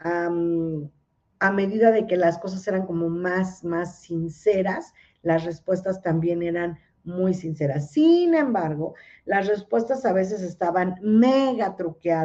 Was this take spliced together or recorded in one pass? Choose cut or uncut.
uncut